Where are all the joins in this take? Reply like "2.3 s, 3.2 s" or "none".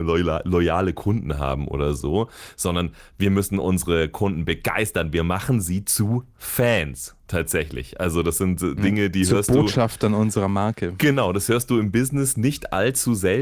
none